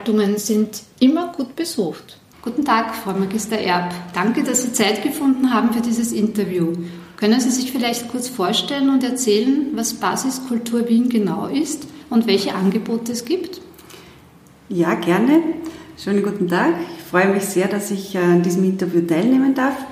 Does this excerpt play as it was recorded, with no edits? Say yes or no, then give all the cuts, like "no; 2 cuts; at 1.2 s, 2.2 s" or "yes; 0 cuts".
no; 1 cut; at 2.3 s